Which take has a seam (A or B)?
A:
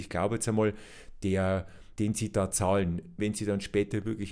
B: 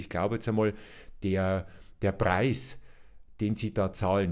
A